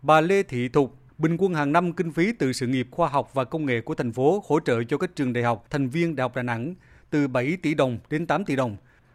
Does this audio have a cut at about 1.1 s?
yes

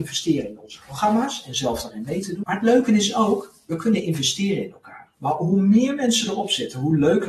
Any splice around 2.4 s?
yes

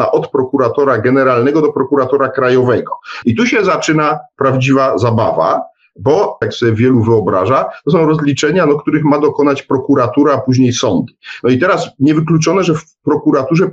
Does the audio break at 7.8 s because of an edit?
no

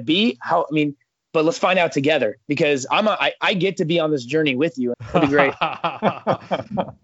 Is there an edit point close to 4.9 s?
yes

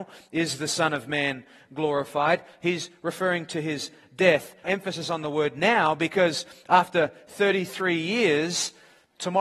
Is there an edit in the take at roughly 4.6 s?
yes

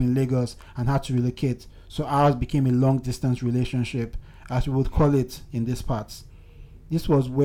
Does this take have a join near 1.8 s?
no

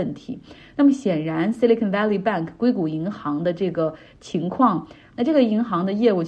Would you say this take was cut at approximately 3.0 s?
no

